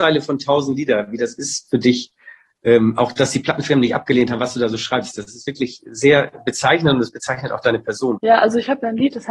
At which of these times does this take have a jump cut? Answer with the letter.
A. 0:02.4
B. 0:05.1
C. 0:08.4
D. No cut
D